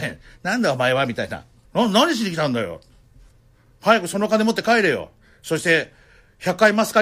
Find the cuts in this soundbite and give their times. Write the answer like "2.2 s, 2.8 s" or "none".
1.6 s